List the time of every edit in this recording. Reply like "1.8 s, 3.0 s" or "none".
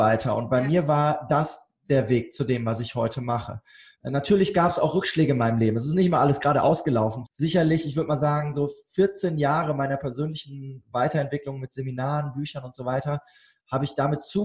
7.3 s

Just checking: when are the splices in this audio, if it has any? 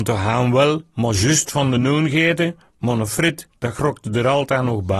none

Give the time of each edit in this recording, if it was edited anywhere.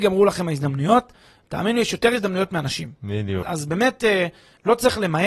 3.4 s

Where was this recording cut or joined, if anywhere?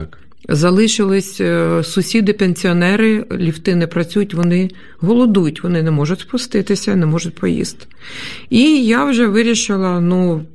none

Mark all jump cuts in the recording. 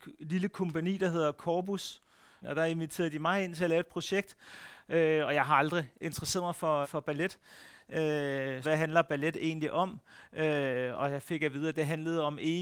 2.4 s, 6.8 s, 8.6 s

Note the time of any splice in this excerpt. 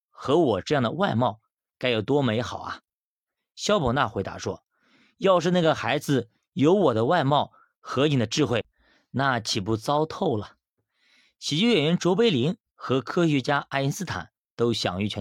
none

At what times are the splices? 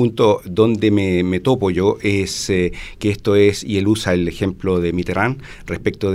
none

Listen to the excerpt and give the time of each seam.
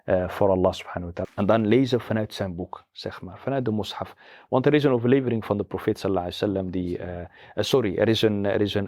1.2 s

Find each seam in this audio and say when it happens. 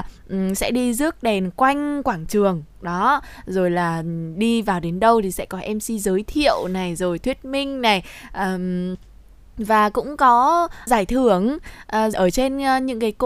10.9 s, 12.1 s

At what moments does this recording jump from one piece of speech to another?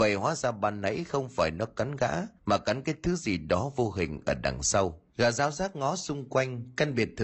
2.4 s

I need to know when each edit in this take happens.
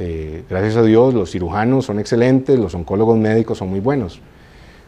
none

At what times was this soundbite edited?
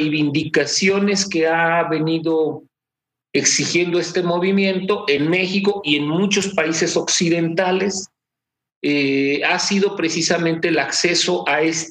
none

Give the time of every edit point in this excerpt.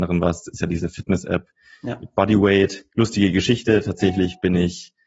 2.9 s

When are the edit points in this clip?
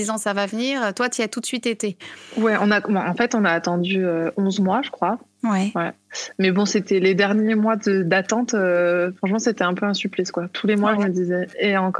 none

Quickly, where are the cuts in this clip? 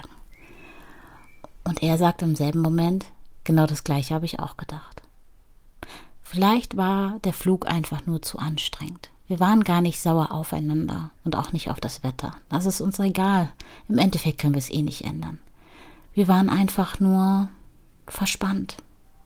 none

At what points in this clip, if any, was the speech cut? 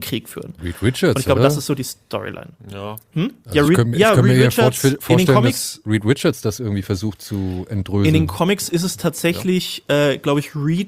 none

